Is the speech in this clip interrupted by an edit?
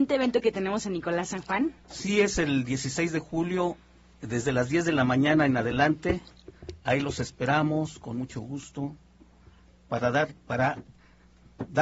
no; 0 cuts

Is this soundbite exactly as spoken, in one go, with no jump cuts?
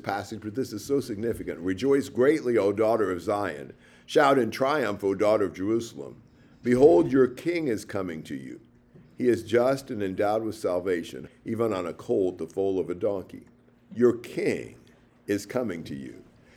no; 2 cuts; at 11.3 s, 13.7 s

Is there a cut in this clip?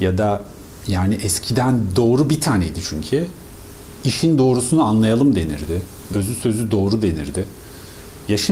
yes; 1 cut; at 6.1 s

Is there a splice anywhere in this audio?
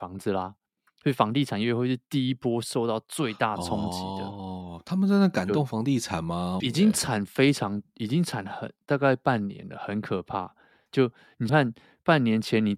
yes; 2 cuts; at 6.6 s, 11.5 s

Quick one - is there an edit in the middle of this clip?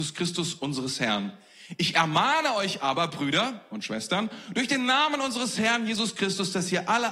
no; 0 cuts

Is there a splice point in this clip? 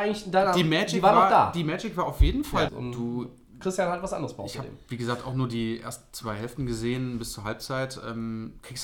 yes; 1 cut; at 2.7 s

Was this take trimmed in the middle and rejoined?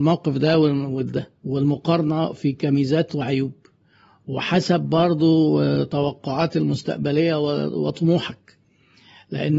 yes; 1 cut; at 1.4 s

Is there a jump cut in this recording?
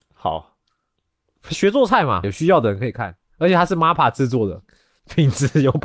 yes; 1 cut; at 2.2 s

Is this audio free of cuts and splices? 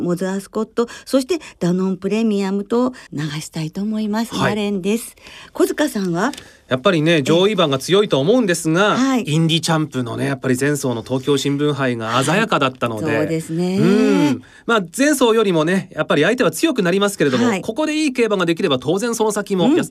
no; 1 cut; at 3.1 s

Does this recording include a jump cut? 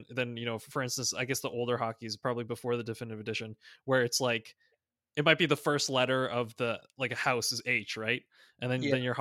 no; 0 cuts

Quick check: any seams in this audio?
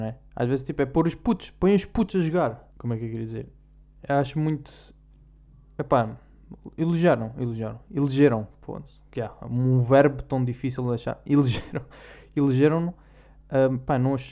yes; 1 cut; at 2.7 s

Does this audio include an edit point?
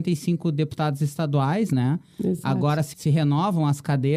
no; 0 cuts

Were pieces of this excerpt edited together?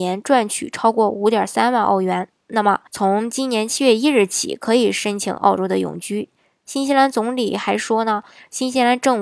yes; 1 cut; at 2.9 s

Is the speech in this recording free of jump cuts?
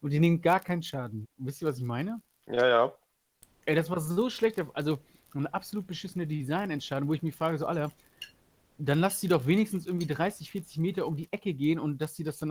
no; 1 cut; at 1.2 s

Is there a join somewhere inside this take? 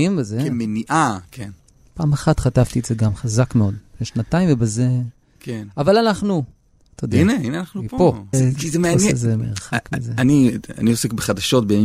yes; 1 cut; at 8.3 s

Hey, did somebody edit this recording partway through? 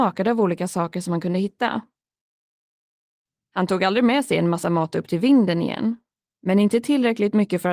yes; 1 cut; at 6.3 s

